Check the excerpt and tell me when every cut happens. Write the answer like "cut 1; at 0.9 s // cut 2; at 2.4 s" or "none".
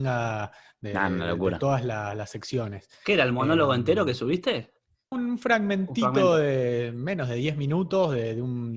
cut 1; at 5.1 s